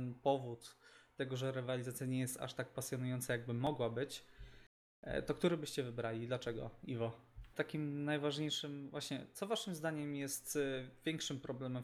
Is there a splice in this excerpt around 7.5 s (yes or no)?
yes